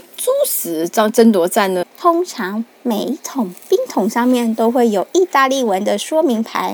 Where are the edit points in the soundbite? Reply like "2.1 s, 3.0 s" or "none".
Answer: 1.8 s